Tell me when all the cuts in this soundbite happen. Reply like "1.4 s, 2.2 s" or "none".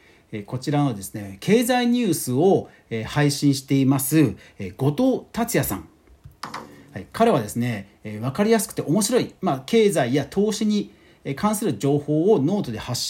none